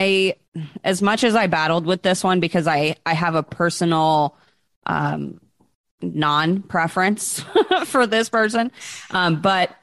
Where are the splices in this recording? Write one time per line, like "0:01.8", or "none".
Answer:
none